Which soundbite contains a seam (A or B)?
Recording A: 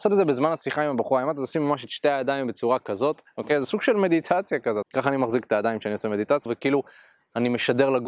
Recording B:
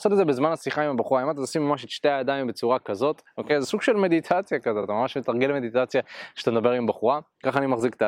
A